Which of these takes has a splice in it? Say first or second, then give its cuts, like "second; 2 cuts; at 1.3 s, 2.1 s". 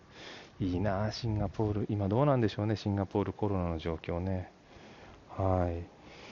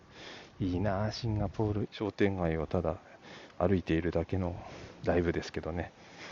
second; 1 cut; at 1.9 s